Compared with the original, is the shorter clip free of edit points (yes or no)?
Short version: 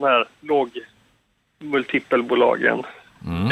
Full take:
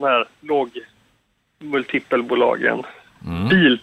yes